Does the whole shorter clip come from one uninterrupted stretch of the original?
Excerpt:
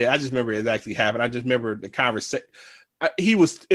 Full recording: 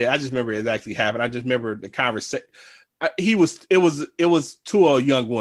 yes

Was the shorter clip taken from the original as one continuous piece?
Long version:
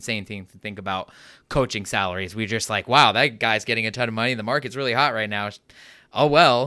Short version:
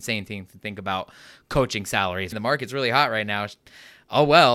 no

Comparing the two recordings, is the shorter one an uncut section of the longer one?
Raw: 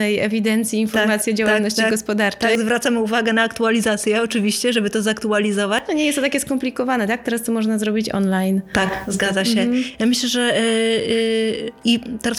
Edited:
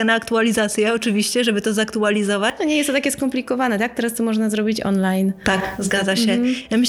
yes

